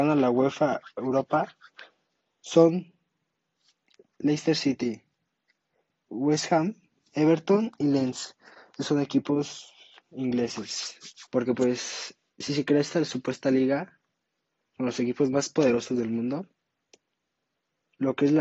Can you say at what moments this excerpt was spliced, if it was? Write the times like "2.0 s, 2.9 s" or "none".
11.3 s